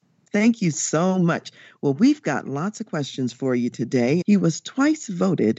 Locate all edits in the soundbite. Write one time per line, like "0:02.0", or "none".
0:04.2